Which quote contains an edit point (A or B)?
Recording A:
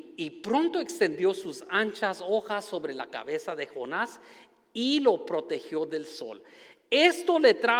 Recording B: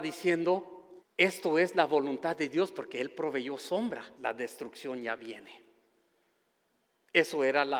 B